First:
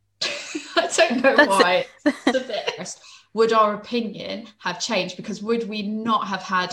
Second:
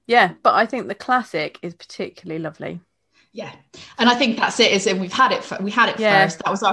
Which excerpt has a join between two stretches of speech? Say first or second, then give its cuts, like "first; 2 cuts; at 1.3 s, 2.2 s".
first; 1 cut; at 2.8 s